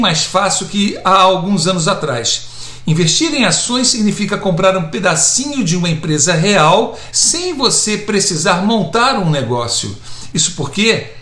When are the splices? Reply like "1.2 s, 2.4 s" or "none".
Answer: 2.8 s, 7.1 s, 10.3 s